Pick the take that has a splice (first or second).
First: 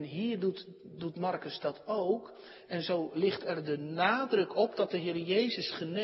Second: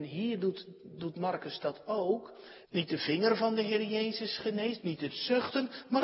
second